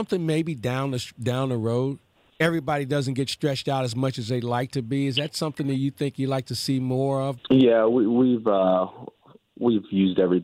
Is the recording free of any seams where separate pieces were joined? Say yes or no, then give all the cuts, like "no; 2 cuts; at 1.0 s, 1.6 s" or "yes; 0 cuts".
no; 2 cuts; at 2.3 s, 7.4 s